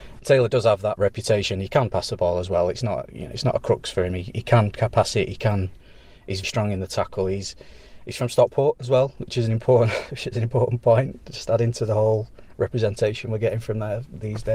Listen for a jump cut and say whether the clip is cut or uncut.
cut